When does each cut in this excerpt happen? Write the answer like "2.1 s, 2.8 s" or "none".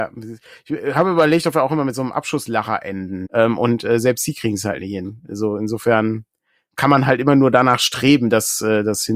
3.2 s